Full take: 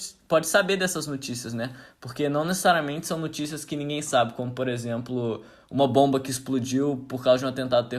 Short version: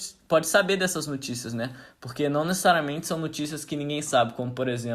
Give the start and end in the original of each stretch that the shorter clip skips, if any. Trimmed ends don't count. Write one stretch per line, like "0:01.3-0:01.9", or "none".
none